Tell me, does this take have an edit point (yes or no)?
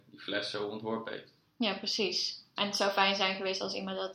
yes